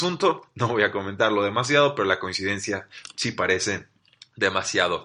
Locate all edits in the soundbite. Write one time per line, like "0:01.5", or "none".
none